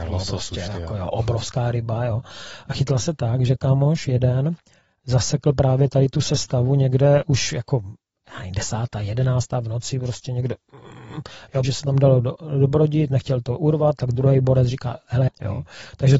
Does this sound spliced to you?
yes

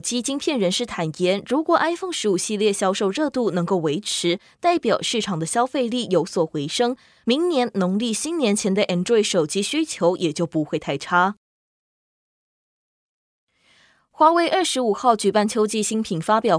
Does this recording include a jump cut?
no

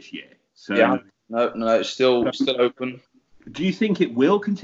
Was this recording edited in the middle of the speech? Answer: no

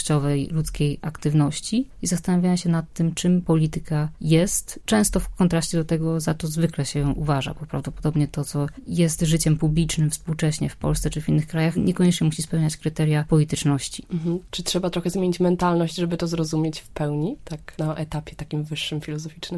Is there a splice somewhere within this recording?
no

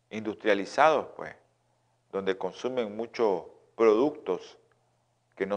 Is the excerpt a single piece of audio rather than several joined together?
yes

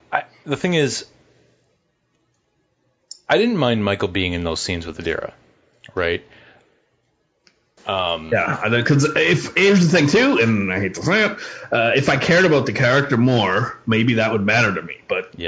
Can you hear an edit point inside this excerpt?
yes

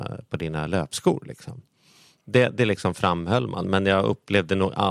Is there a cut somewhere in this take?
no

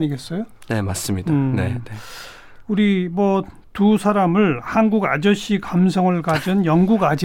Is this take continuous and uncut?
yes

